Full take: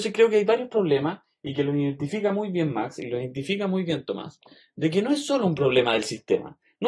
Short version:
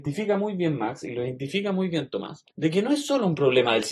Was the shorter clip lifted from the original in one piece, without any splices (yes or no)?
no